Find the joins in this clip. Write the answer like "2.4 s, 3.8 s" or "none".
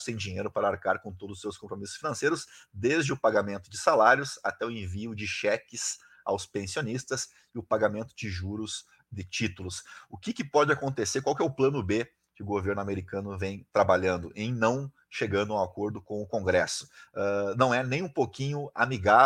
none